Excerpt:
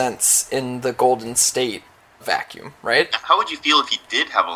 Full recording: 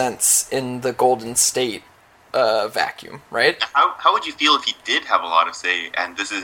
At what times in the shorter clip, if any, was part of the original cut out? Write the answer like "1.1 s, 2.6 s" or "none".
2.2 s, 3.2 s